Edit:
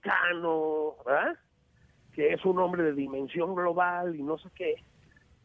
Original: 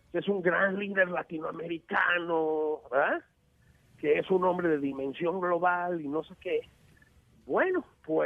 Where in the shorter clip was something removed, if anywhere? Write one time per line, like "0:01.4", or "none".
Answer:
none